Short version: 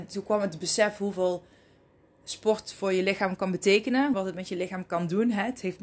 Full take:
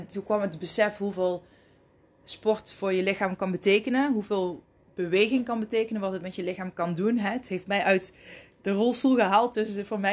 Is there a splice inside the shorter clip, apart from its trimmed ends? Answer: yes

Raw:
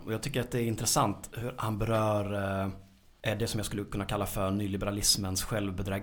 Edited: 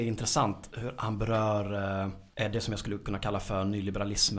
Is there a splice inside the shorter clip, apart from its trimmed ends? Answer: yes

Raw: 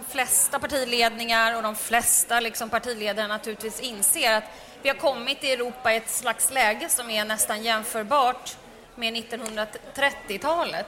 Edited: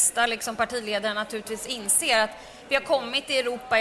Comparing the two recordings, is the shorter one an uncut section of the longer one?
yes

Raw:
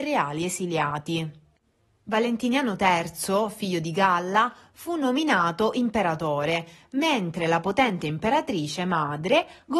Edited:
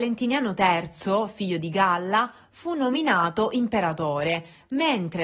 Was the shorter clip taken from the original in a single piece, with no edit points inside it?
yes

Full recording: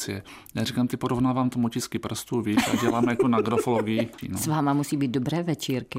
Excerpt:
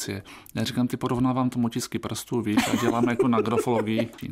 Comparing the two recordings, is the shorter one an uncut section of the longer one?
yes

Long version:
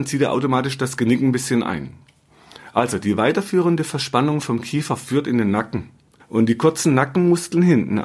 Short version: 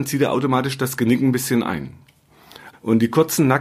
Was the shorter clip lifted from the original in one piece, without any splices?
no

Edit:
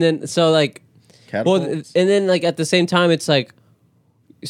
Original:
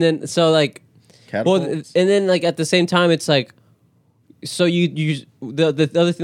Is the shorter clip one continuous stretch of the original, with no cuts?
yes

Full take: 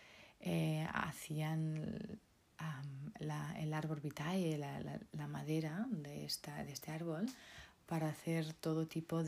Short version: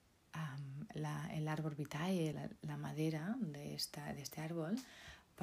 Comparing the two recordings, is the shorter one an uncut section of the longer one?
no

